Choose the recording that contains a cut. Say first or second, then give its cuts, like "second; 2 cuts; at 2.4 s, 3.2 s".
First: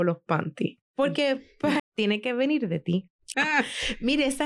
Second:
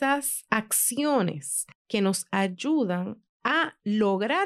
first; 2 cuts; at 1.8 s, 3.3 s